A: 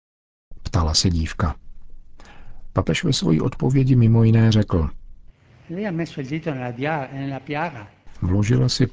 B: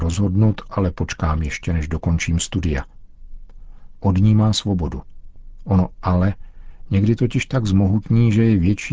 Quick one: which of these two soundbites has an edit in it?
B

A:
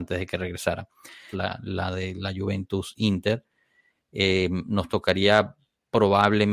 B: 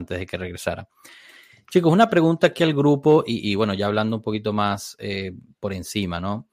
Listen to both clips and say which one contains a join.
A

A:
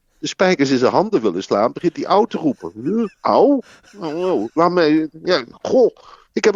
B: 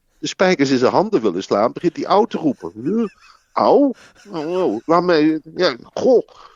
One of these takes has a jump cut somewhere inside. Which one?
A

